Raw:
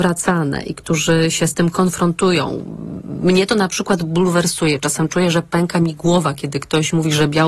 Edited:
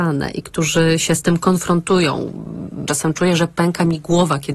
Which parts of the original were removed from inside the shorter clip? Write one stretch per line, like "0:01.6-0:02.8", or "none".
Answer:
0:03.2-0:04.8